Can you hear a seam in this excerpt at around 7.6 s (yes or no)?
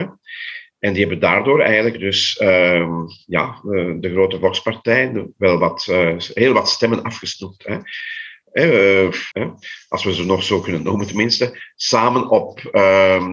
no